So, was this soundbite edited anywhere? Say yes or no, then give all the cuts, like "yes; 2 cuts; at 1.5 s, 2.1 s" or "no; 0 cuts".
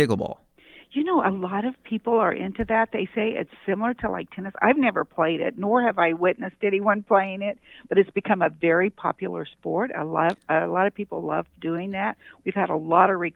no; 0 cuts